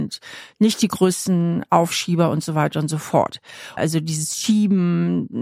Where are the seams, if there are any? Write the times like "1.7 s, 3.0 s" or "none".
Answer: 3.8 s